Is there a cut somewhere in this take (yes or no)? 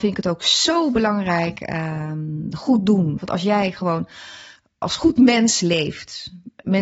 yes